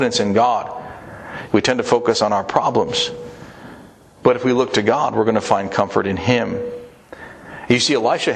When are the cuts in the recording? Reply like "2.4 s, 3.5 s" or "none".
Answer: 1.5 s